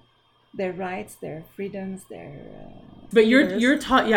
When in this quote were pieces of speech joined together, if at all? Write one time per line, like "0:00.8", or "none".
0:03.1